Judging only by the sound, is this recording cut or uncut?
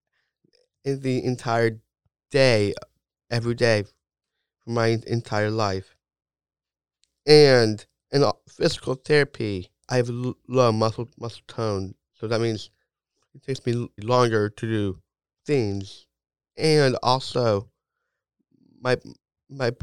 uncut